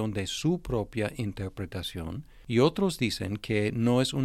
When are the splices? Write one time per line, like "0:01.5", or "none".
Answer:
none